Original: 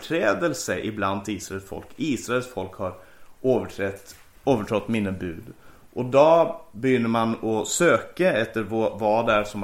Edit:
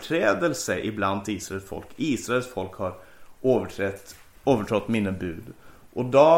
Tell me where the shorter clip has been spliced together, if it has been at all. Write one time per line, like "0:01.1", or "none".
none